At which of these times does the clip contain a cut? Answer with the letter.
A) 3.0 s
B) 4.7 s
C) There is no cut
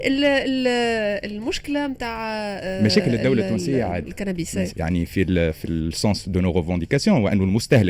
B